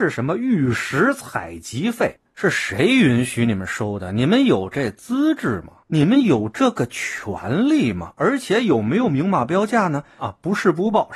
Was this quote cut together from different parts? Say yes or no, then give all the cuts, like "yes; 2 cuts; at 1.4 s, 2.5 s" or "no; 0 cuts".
yes; 1 cut; at 10.2 s